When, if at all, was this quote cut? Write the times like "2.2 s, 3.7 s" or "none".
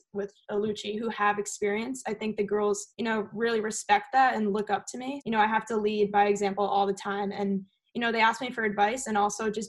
2.9 s, 5.2 s

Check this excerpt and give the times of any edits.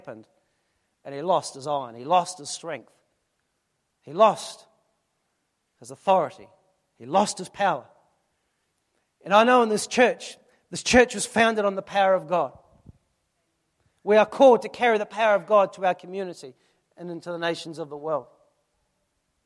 none

